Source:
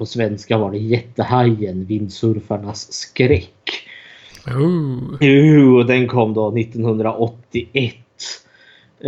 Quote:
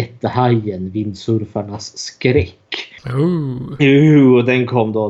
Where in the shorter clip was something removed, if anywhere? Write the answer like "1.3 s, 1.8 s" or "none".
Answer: 3.0 s